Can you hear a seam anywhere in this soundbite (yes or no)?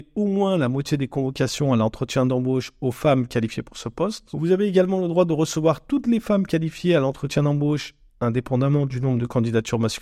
no